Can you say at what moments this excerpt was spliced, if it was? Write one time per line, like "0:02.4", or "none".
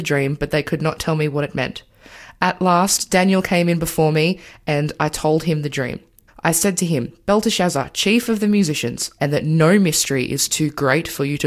0:06.3
0:09.2